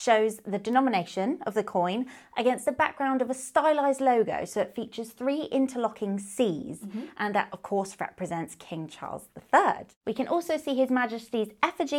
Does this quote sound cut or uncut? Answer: uncut